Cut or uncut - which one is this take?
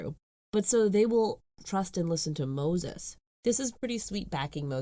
uncut